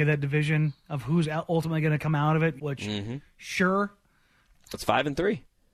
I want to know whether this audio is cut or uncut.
cut